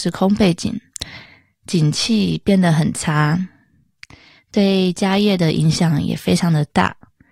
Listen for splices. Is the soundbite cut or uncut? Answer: uncut